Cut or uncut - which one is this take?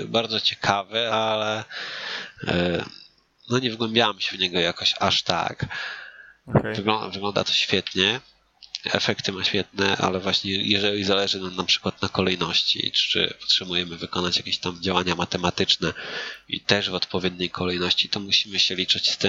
uncut